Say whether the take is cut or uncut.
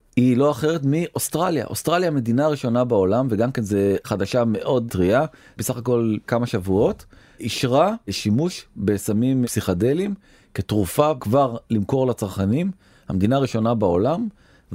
uncut